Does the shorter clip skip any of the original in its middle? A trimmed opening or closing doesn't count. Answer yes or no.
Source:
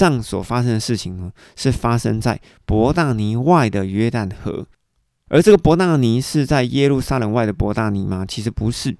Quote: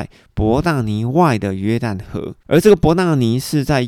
yes